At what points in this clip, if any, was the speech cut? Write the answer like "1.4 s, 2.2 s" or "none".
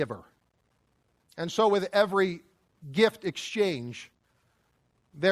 1.2 s